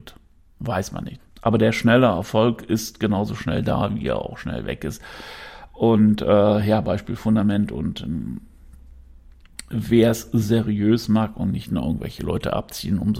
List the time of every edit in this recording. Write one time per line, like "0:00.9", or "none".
0:01.2

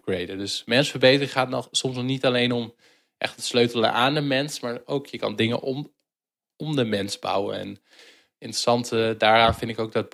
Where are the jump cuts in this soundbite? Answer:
none

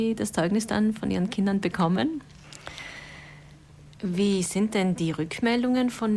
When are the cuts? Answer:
0:04.0

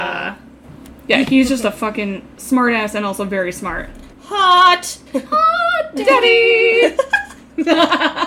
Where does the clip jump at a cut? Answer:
0:05.1

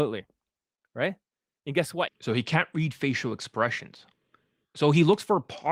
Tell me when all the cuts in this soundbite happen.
0:02.1

